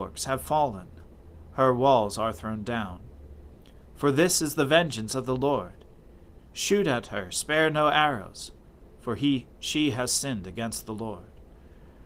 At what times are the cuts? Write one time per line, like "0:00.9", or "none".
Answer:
0:06.4